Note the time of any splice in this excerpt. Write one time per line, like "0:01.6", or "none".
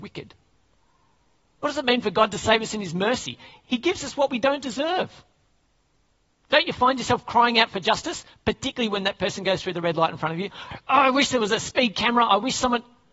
none